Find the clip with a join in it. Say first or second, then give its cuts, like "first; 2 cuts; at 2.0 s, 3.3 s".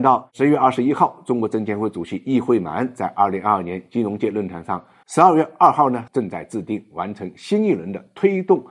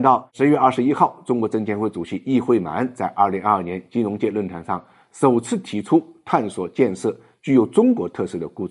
first; 2 cuts; at 5.0 s, 6.1 s